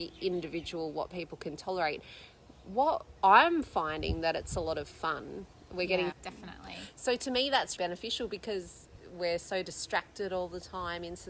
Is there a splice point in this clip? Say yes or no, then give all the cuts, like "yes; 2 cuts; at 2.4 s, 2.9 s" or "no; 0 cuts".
yes; 2 cuts; at 6.1 s, 7.8 s